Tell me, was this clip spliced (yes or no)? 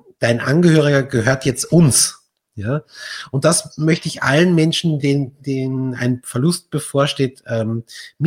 no